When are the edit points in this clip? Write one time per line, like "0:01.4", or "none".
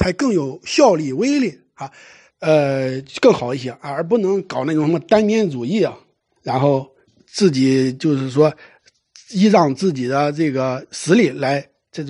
0:02.3
0:06.4